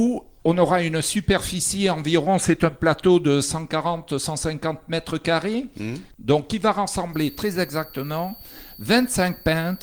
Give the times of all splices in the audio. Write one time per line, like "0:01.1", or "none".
0:06.1